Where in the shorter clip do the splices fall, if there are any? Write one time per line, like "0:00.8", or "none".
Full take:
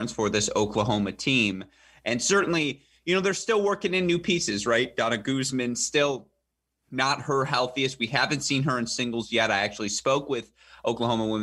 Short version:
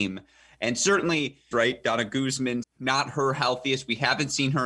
0:01.5
0:02.6